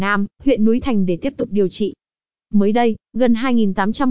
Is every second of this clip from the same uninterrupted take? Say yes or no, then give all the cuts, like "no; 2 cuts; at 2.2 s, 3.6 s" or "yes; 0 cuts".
no; 1 cut; at 2.3 s